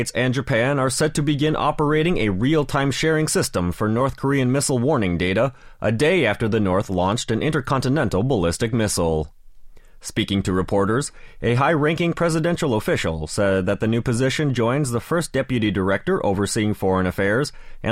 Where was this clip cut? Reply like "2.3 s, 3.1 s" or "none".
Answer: 10.0 s